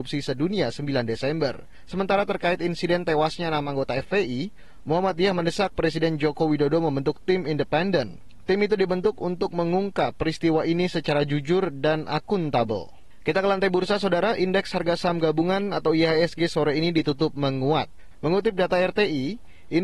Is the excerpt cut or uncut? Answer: cut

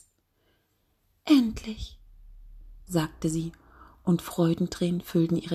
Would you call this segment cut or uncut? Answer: cut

